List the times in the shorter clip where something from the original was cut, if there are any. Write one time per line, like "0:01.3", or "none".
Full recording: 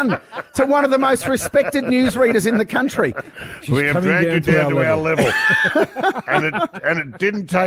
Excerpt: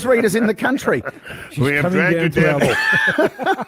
0:02.6